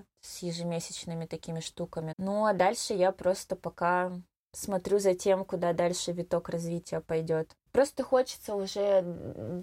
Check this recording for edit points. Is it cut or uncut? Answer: cut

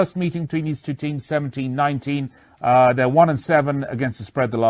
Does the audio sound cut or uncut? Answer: uncut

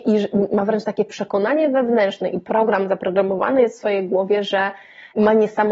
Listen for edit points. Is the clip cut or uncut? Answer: uncut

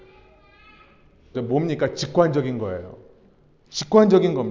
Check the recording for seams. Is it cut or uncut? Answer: cut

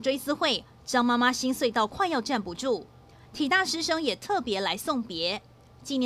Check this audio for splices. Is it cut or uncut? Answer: uncut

